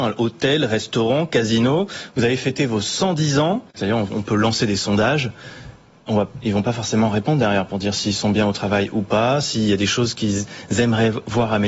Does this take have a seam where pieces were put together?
yes; 1 cut; at 3.8 s

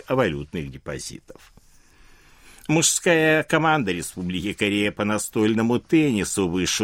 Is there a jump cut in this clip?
no; 0 cuts

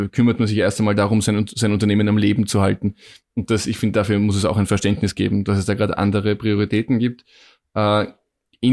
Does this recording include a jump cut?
no; 0 cuts

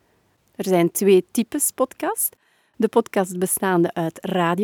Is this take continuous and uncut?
yes; 0 cuts

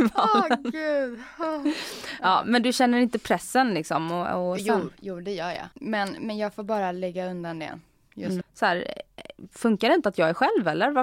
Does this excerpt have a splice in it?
yes; 3 cuts; at 4.6 s, 5.7 s, 8.4 s

